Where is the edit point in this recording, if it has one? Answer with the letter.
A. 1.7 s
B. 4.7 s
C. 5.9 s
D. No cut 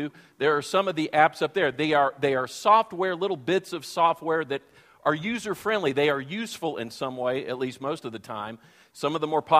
D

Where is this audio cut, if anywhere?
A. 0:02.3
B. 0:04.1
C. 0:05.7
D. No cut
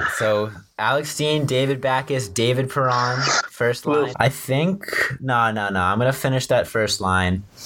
B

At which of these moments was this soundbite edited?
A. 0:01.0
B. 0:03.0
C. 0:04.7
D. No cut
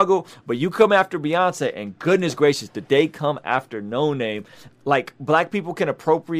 C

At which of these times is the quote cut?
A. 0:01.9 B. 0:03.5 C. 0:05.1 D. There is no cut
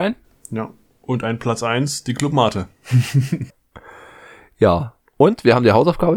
B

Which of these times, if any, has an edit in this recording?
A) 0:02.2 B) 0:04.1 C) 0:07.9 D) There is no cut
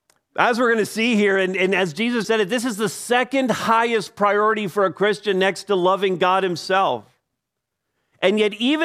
A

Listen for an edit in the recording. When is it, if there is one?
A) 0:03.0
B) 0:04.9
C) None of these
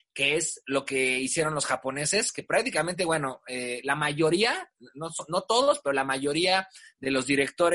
C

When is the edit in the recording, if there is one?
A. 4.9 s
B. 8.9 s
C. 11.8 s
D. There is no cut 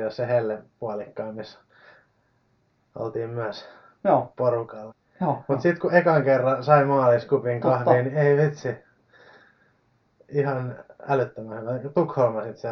A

